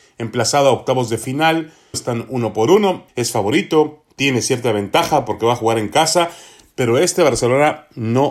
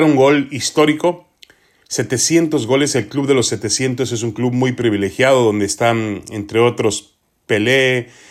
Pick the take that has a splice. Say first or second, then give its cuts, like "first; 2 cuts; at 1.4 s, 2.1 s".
first; 2 cuts; at 1.9 s, 3.1 s